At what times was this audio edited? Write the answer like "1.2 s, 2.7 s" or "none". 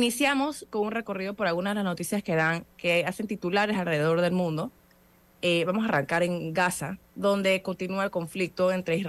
7.1 s

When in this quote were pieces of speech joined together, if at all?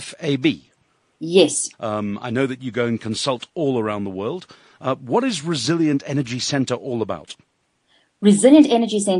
1.7 s

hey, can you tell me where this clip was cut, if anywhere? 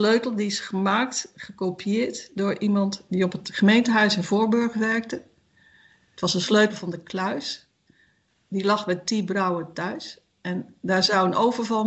3.1 s

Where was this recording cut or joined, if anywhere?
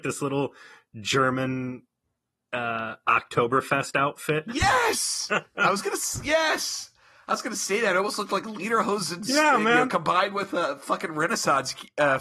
none

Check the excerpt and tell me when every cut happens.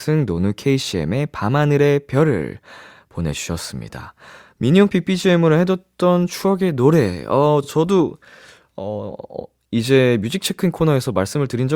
none

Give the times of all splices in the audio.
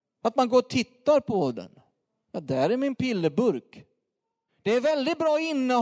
4.5 s

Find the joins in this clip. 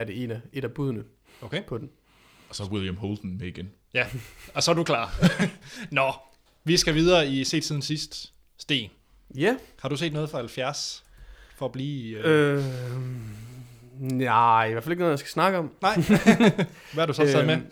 none

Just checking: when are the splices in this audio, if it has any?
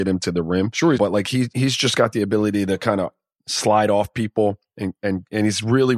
0.9 s

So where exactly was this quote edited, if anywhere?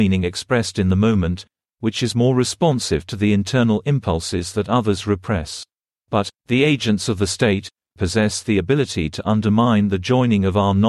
6.0 s, 8.0 s

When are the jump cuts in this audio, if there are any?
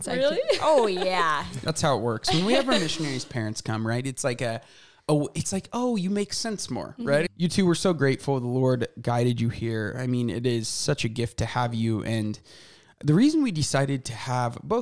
none

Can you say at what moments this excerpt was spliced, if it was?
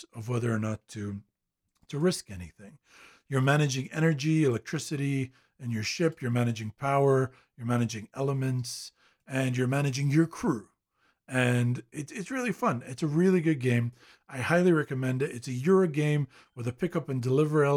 none

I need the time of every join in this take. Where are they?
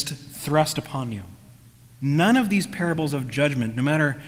1.8 s

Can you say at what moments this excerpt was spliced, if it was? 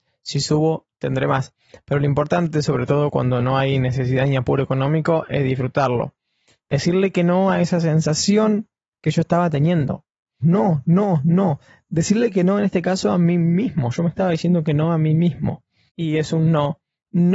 10.4 s, 15.9 s

